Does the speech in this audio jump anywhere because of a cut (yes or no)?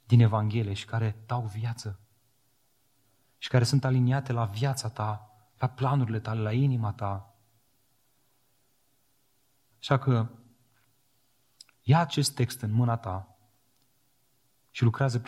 yes